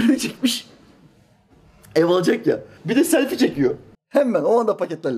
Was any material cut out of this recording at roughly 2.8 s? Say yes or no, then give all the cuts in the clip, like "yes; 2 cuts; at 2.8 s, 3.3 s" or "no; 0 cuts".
yes; 2 cuts; at 2.8 s, 3.9 s